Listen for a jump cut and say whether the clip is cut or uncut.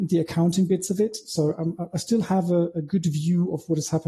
uncut